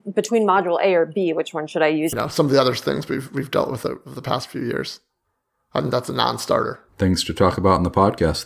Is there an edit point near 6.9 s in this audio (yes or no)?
yes